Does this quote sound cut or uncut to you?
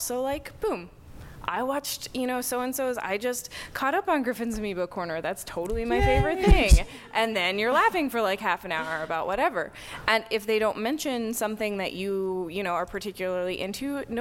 uncut